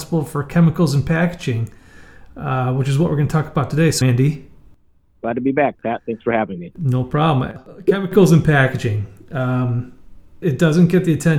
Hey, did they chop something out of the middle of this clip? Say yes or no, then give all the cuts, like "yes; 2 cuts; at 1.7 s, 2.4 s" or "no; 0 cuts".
yes; 2 cuts; at 4.0 s, 10.4 s